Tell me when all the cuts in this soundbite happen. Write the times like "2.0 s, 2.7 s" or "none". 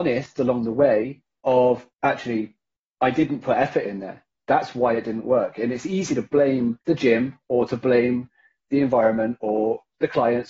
1.9 s, 6.8 s

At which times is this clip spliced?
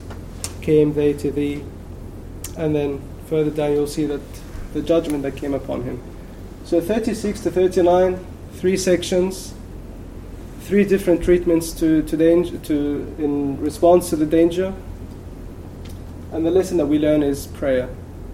13.1 s

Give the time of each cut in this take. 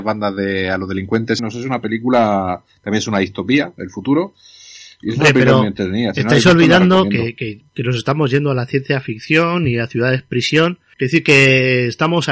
1.4 s, 10.9 s

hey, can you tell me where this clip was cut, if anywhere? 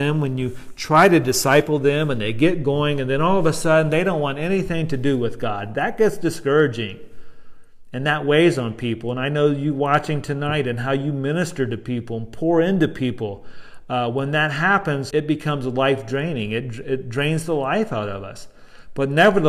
15.1 s

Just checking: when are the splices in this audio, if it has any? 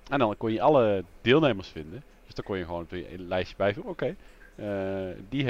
none

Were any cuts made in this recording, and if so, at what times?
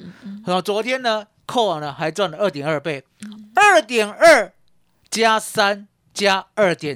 none

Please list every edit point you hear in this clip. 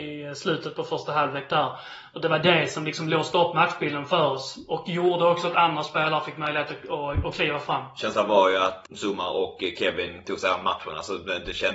8.8 s

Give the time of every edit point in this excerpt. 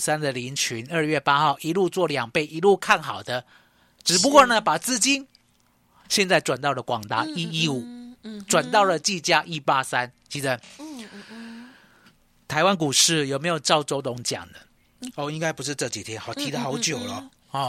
15.1 s

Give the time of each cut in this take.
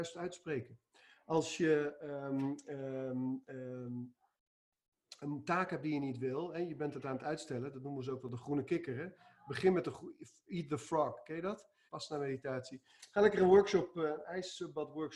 11.9 s

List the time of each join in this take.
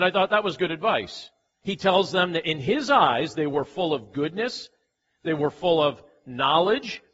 1.6 s

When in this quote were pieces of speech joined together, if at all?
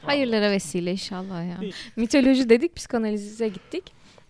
1.7 s

